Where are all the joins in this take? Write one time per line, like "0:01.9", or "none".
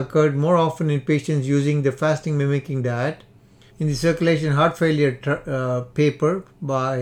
0:03.7

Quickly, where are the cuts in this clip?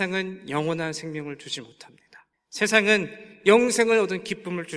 none

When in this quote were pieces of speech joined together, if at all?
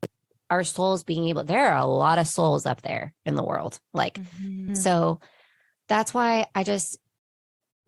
0:04.7

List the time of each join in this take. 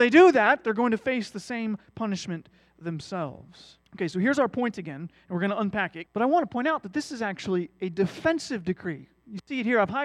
0:03.9
0:06.1

